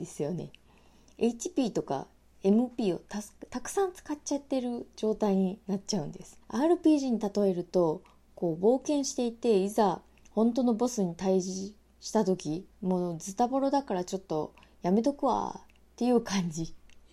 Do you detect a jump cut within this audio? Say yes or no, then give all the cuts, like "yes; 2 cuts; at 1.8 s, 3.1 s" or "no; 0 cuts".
yes; 2 cuts; at 6.4 s, 12.7 s